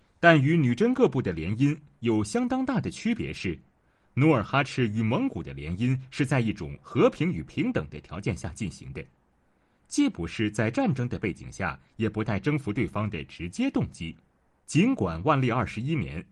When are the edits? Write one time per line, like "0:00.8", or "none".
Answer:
0:14.6